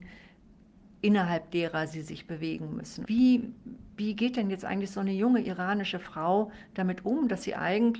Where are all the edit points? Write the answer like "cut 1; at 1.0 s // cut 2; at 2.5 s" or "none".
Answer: cut 1; at 3.0 s